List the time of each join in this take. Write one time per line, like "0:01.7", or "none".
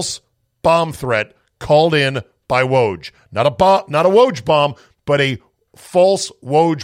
none